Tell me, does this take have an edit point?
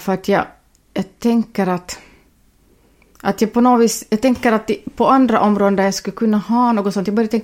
no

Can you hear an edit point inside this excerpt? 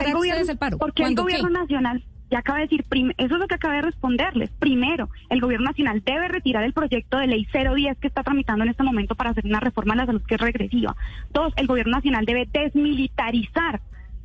no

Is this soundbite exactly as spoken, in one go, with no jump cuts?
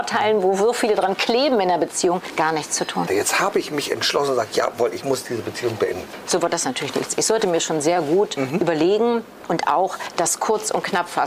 no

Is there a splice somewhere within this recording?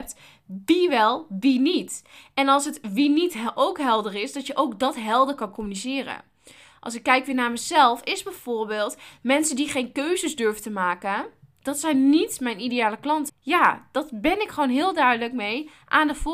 yes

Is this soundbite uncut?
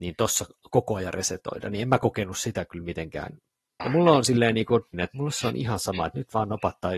no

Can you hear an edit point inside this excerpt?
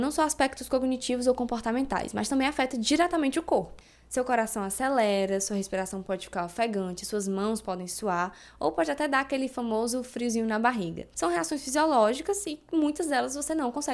no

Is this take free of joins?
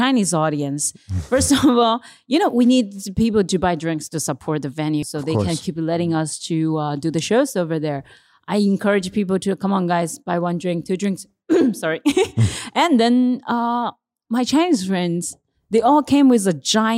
no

